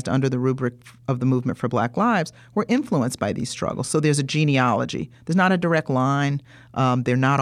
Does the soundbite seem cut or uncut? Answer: uncut